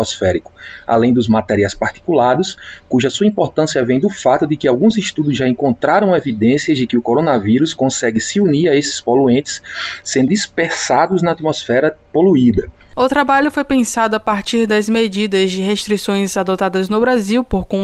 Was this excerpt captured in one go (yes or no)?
no